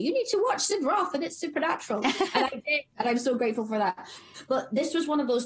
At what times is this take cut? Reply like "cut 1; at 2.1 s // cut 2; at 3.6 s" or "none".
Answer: none

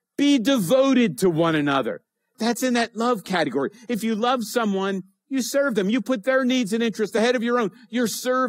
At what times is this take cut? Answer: none

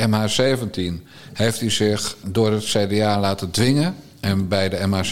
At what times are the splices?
cut 1; at 2.2 s

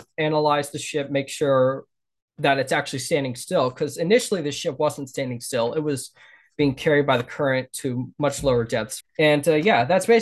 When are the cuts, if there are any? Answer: cut 1; at 9.0 s

